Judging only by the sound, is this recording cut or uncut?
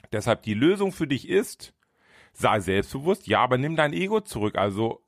uncut